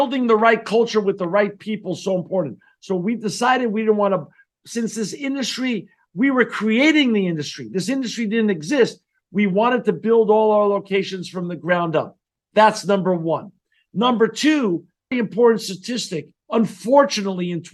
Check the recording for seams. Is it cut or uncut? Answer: cut